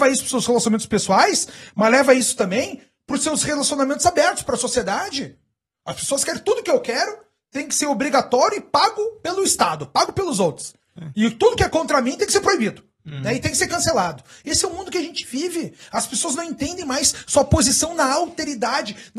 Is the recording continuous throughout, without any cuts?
yes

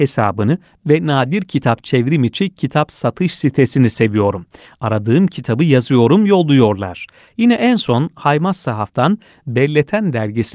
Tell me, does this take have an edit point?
no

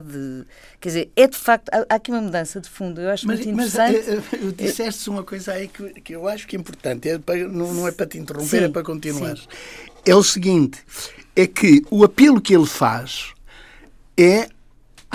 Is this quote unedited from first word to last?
yes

